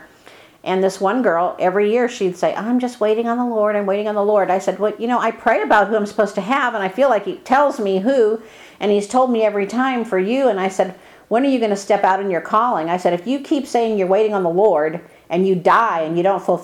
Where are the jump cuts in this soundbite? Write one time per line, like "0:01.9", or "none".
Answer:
none

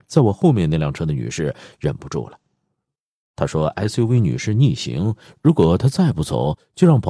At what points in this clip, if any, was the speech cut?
none

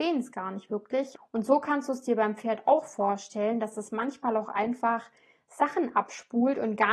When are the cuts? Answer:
0:01.1

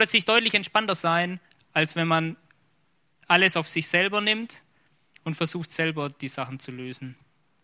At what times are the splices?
none

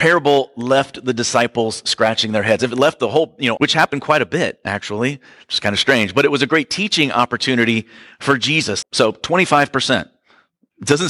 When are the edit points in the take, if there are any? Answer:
0:03.6
0:08.8

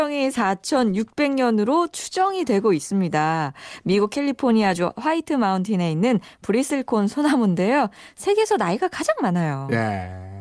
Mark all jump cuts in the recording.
none

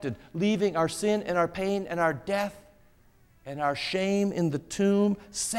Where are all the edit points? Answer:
none

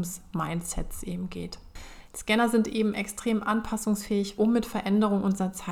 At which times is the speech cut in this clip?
0:02.1
0:04.4

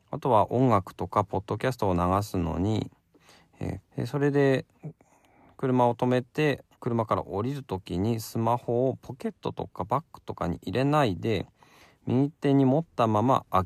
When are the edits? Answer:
0:03.8
0:06.7

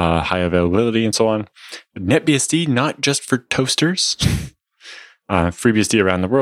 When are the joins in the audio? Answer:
none

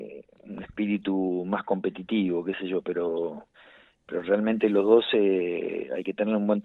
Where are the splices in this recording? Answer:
none

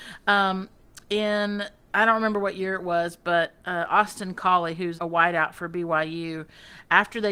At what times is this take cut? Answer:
0:05.0

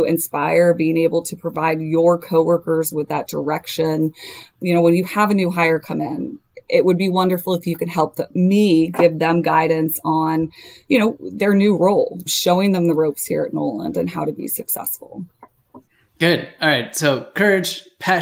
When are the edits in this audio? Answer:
none

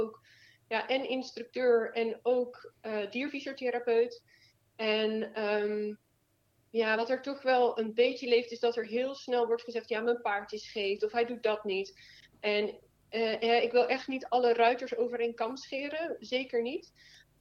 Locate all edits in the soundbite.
0:11.0

